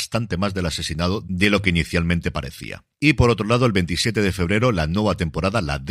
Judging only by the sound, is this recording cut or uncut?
uncut